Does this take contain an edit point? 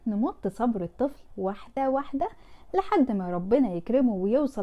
no; 0 cuts

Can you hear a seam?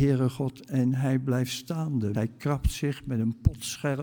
yes; 1 cut; at 2.1 s

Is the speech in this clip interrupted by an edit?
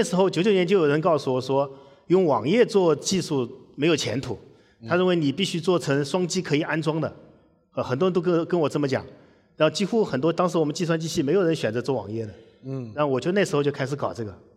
no; 0 cuts

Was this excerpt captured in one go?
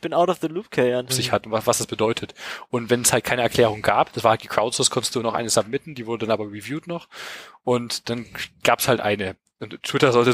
no; 1 cut; at 1.1 s

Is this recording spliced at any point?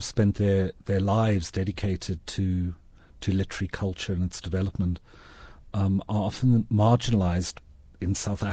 no; 0 cuts

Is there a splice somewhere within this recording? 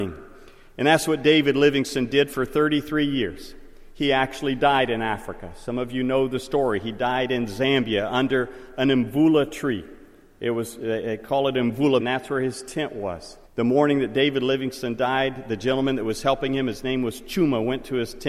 yes; 2 cuts; at 12.0 s, 13.5 s

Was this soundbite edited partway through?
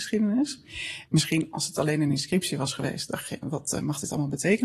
yes; 2 cuts; at 1.1 s, 3.4 s

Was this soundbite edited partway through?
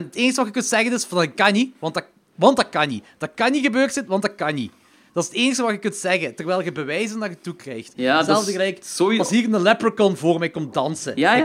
no; 0 cuts

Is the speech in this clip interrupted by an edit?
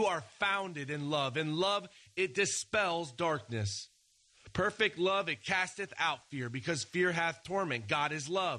no; 0 cuts

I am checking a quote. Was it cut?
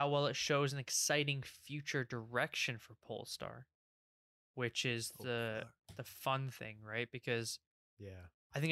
no; 0 cuts

